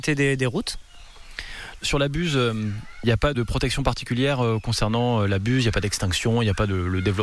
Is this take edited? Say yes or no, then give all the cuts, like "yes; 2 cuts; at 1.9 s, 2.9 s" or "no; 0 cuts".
yes; 2 cuts; at 1.8 s, 3.3 s